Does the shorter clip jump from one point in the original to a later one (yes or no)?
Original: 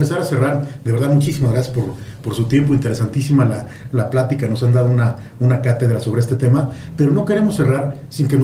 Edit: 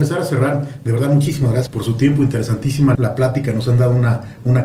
yes